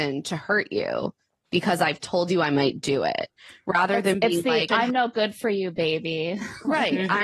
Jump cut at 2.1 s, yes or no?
no